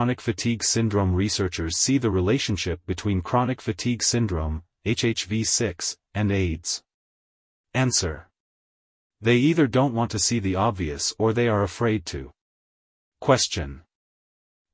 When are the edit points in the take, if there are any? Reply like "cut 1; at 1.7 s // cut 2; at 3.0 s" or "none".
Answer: none